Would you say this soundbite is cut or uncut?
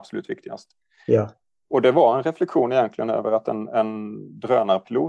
uncut